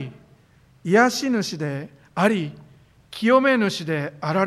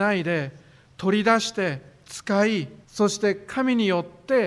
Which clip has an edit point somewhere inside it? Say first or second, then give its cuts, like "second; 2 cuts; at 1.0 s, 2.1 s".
second; 1 cut; at 2.8 s